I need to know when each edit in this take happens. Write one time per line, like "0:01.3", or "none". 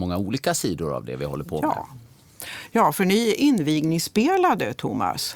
none